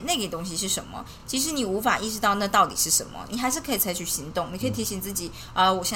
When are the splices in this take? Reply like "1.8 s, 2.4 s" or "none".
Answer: none